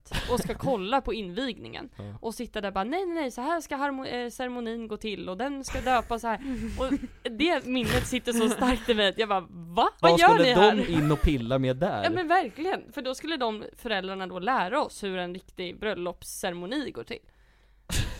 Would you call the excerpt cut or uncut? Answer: cut